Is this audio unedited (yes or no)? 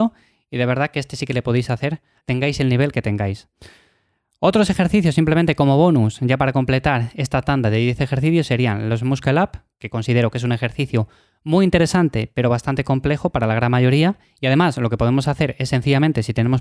yes